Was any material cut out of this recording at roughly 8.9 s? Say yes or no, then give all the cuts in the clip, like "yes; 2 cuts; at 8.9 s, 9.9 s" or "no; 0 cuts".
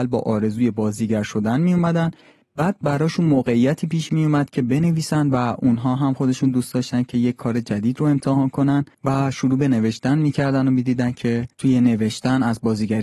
yes; 2 cuts; at 8.9 s, 11.5 s